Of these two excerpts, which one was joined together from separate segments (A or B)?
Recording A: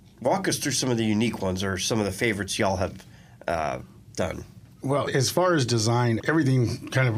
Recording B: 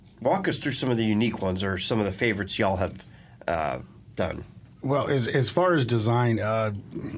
A